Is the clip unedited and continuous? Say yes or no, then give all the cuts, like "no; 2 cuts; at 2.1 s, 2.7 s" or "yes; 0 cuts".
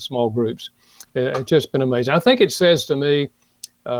no; 1 cut; at 1.0 s